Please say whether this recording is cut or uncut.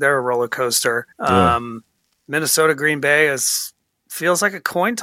cut